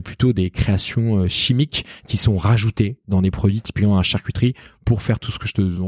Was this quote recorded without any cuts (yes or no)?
yes